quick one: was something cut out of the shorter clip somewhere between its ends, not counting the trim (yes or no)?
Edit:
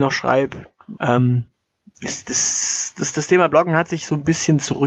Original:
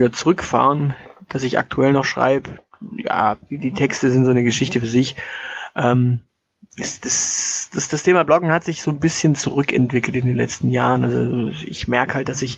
yes